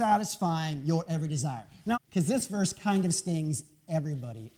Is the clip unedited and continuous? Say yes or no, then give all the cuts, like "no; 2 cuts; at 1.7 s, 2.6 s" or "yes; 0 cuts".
no; 1 cut; at 1.9 s